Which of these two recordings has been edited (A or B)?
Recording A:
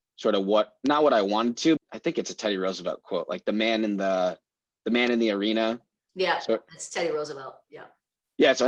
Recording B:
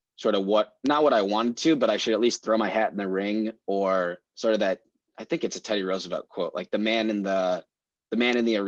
A